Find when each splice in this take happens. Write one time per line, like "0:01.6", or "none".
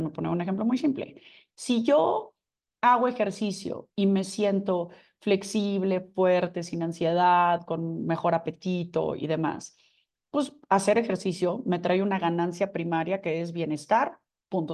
none